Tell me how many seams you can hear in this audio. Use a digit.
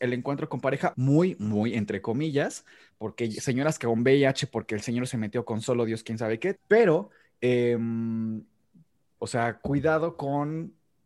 3